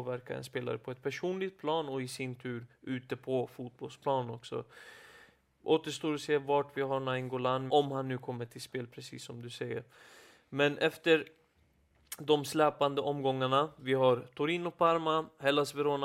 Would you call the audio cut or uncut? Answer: cut